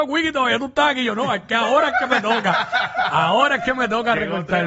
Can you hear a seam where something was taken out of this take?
no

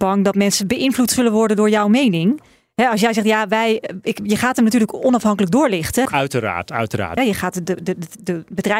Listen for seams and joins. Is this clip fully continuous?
no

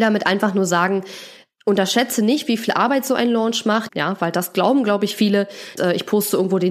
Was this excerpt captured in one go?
no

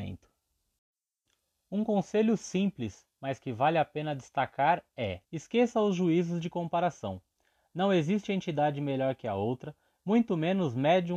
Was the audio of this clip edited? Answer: yes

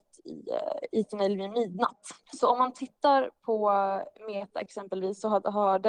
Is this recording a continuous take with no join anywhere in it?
no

